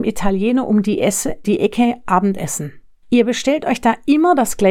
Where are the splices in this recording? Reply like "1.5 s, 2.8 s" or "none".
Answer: 1.4 s, 3.0 s